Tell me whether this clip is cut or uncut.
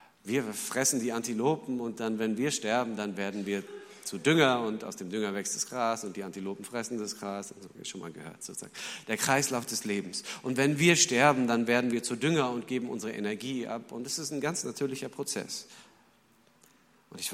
cut